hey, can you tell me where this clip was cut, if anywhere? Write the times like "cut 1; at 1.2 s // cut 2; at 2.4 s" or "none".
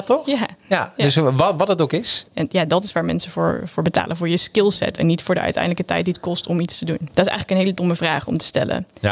cut 1; at 2.3 s // cut 2; at 7.1 s